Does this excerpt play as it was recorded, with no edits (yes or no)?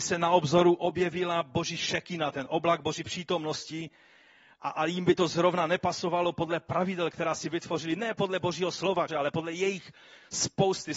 no